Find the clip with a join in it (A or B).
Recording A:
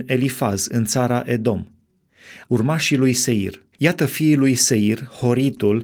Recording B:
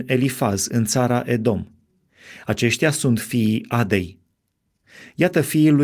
A